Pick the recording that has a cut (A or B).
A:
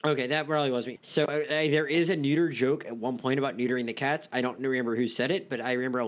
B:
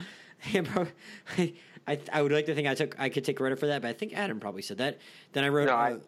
A